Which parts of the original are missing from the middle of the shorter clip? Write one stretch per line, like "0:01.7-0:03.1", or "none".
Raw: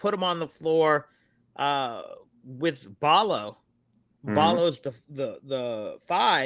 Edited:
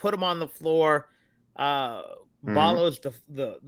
0:02.3-0:04.1